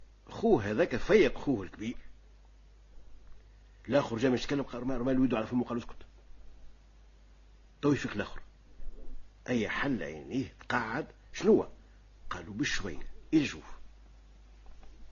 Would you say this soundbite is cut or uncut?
uncut